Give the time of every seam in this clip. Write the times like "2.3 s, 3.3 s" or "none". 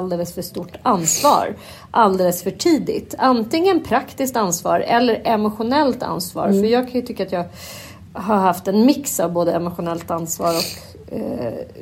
none

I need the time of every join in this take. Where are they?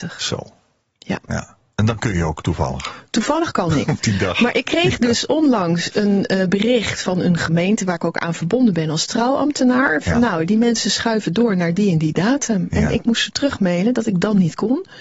none

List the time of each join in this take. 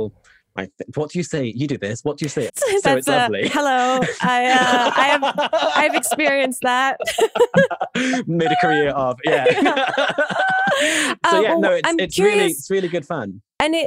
2.5 s

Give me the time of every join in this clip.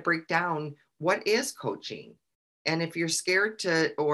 none

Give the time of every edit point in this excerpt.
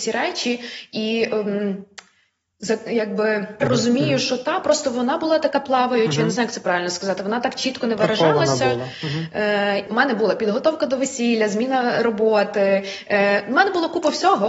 3.6 s, 9.9 s

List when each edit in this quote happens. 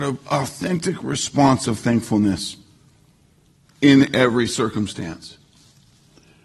none

